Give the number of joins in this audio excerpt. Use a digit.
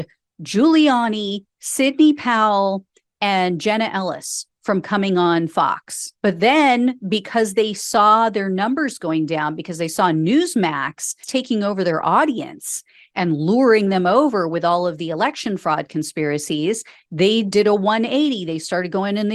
1